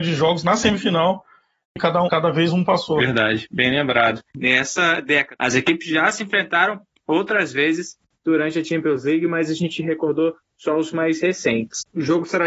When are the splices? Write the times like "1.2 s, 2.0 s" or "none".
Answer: 2.1 s